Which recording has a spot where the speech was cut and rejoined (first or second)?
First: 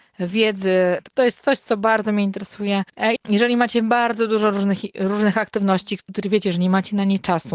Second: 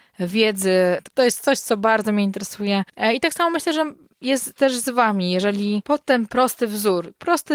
first